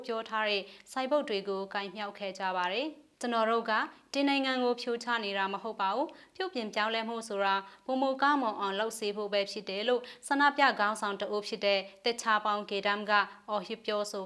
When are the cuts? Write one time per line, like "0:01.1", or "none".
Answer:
0:03.1